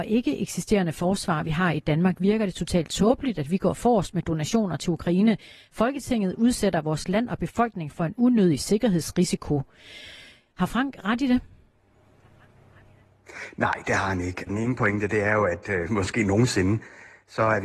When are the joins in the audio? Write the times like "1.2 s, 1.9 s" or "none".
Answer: 14.5 s, 15.9 s